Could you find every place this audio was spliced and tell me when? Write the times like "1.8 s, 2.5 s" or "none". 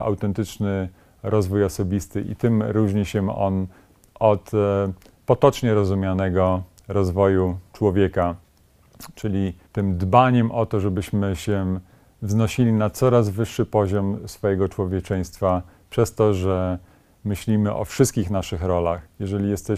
9.7 s